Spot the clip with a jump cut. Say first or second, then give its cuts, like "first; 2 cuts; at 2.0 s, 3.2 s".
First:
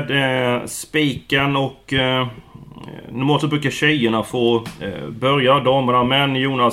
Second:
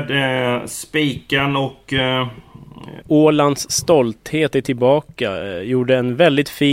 second; 1 cut; at 3.0 s